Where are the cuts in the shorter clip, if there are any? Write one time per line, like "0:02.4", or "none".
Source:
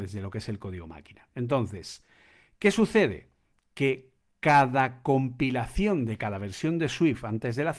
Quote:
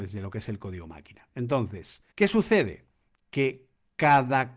0:02.1